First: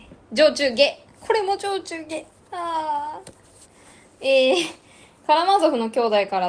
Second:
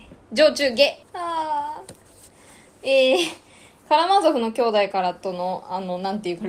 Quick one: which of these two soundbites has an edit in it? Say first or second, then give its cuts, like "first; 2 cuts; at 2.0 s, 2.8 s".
second; 1 cut; at 1.0 s